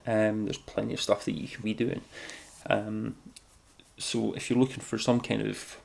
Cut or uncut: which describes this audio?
cut